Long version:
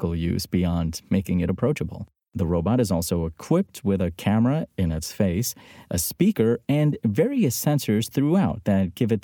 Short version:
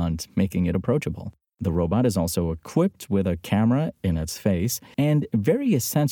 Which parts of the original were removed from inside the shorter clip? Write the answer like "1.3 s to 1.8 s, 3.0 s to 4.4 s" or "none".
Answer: 5.7 s to 6.6 s